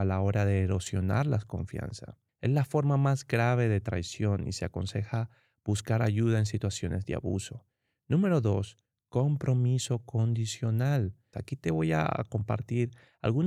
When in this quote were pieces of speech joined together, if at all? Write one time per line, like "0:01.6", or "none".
0:02.3
0:11.3

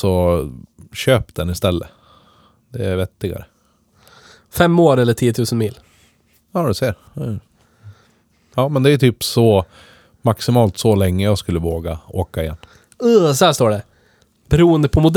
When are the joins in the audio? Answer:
none

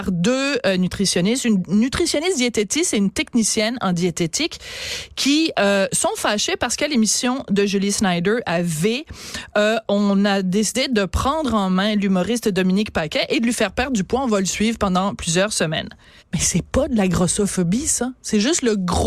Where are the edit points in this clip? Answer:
0:16.2

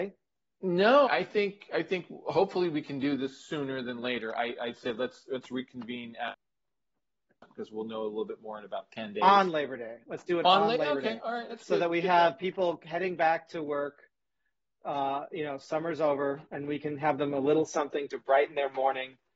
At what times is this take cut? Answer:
0:01.0
0:11.5

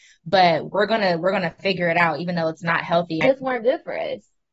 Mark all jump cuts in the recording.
0:03.2

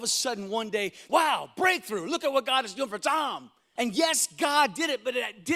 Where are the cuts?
0:01.1
0:03.8

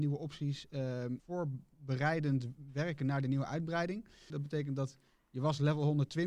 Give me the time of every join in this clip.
0:01.2
0:04.3

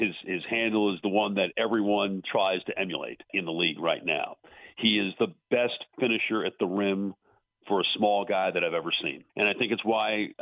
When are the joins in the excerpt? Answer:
0:03.3
0:09.3

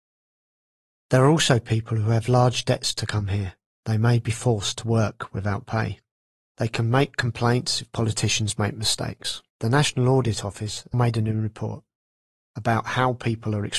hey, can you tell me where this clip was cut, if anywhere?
0:06.4
0:09.5
0:10.9

